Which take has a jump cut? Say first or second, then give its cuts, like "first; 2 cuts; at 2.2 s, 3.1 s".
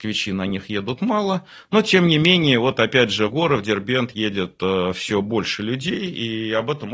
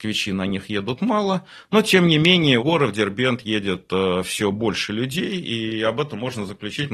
second; 1 cut; at 2.6 s